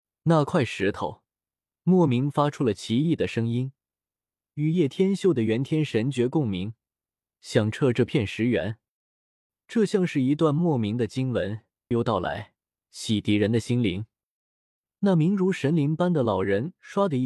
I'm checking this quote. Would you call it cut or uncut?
cut